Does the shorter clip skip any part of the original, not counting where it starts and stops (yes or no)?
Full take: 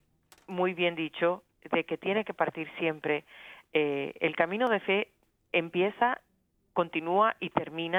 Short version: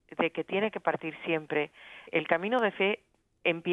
yes